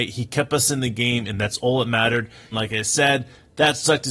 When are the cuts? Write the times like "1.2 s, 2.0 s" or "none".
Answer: 2.5 s